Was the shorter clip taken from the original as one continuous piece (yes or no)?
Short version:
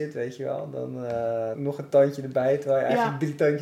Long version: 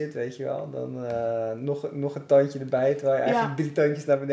no